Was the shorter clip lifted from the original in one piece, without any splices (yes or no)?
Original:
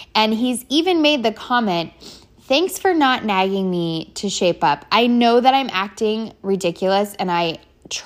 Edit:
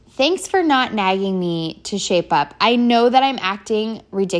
yes